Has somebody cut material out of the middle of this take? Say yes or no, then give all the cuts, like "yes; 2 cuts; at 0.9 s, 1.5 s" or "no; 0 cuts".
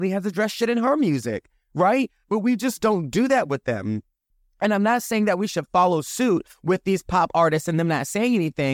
no; 0 cuts